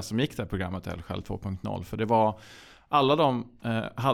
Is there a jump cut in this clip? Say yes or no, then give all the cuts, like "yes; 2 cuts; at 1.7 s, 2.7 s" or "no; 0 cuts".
no; 0 cuts